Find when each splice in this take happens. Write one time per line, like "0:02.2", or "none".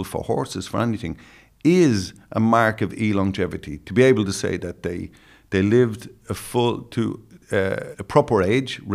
0:07.9